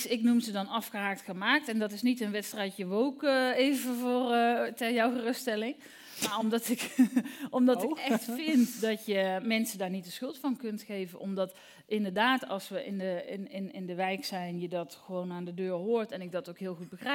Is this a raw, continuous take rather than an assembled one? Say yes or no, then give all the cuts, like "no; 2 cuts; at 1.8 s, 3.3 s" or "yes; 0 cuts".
yes; 0 cuts